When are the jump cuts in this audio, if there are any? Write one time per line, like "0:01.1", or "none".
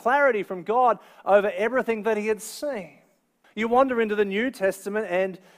0:03.4

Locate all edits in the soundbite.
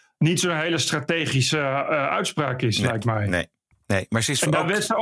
0:03.7

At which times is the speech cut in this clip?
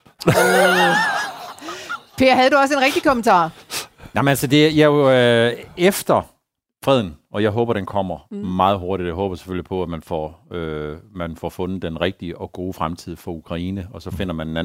none

